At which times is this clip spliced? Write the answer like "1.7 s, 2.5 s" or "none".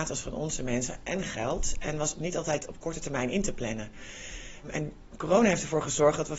none